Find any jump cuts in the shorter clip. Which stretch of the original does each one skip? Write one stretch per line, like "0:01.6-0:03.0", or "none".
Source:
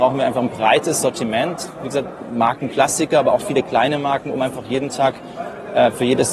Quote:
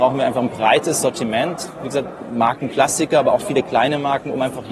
none